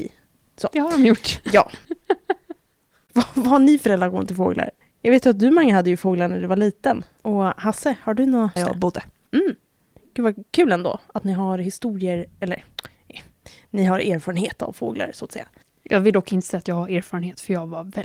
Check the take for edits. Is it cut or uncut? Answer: cut